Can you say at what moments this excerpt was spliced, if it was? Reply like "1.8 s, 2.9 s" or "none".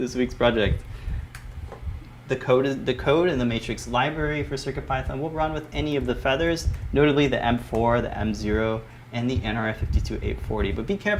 2.3 s